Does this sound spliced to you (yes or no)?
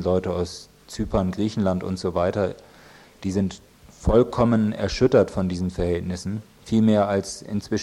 no